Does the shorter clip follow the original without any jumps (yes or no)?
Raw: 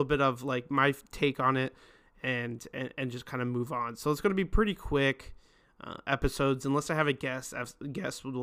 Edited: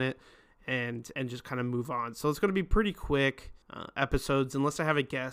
no